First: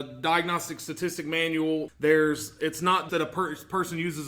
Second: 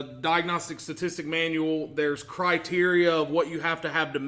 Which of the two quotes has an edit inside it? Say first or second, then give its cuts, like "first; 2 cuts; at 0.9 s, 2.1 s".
first; 2 cuts; at 1.9 s, 3.1 s